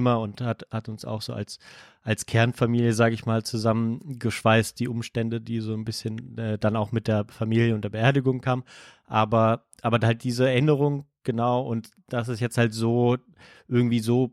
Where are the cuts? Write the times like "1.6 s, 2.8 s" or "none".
none